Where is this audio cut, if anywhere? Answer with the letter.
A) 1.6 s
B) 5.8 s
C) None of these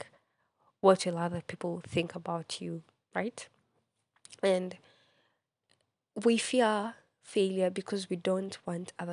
C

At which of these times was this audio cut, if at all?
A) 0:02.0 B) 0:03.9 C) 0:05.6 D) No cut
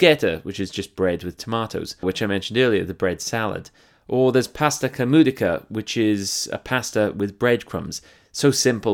A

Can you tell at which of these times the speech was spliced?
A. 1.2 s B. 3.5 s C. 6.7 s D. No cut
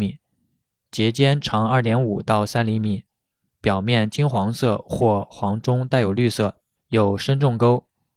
D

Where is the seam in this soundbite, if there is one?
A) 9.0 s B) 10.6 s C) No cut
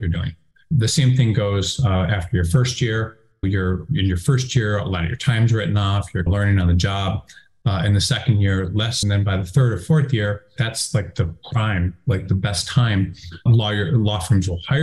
B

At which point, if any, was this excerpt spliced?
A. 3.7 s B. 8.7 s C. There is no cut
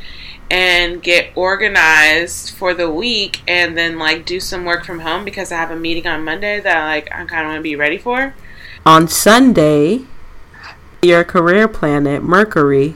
B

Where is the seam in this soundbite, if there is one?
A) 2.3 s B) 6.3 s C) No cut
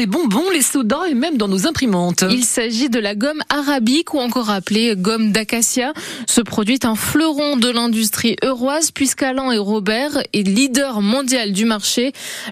C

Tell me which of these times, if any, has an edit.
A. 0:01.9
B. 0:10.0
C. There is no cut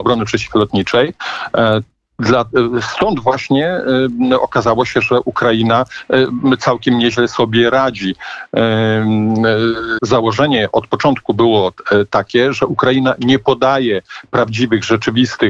B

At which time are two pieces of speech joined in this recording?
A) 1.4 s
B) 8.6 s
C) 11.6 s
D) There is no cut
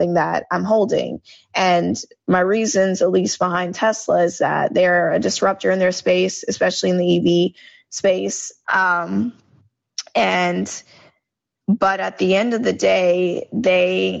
B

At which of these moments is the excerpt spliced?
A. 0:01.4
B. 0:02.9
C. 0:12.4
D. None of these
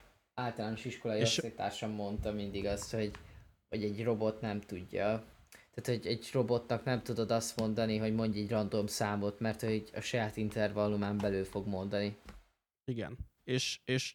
D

